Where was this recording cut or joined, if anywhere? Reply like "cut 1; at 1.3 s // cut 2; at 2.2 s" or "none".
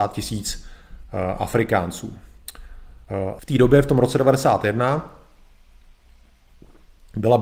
cut 1; at 3.4 s